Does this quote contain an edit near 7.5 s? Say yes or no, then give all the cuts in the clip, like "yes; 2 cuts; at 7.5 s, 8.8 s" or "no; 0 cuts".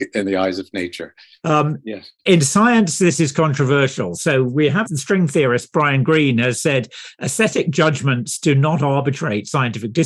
no; 2 cuts; at 1.4 s, 4.9 s